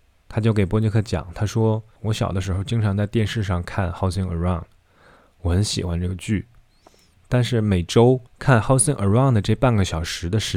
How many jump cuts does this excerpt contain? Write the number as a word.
three